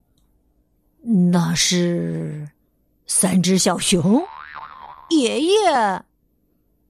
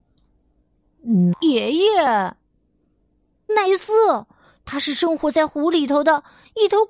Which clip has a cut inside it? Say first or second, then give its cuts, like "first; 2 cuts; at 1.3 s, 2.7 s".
second; 2 cuts; at 1.3 s, 3.5 s